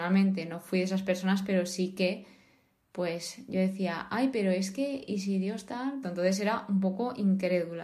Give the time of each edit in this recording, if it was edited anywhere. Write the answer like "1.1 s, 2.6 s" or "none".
6.0 s